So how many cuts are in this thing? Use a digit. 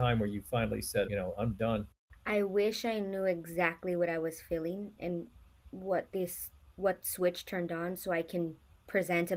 1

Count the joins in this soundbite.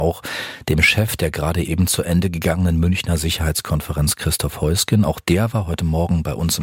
0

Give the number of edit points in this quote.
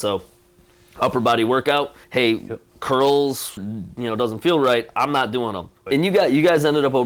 3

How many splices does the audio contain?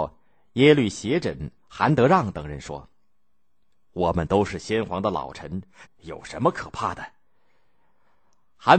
1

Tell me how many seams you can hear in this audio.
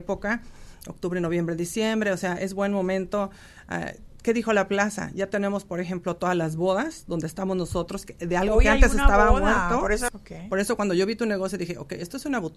1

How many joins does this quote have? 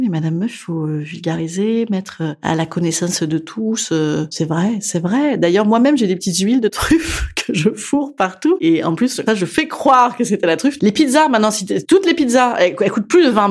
2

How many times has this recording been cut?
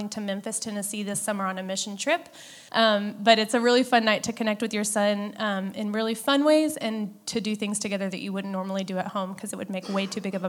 1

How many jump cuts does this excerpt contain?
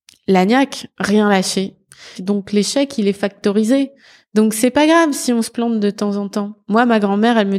1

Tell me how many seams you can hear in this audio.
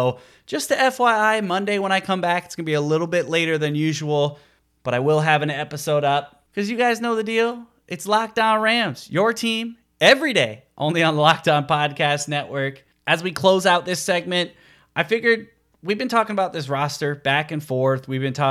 0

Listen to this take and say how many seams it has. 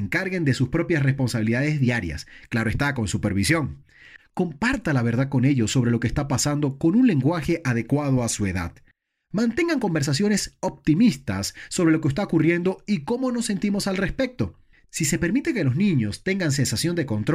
1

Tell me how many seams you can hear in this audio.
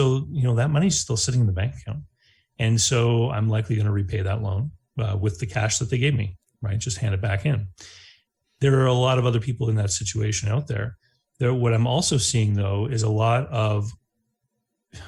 0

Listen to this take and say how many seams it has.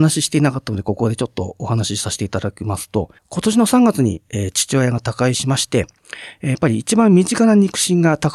1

